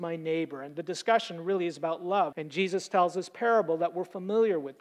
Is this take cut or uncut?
cut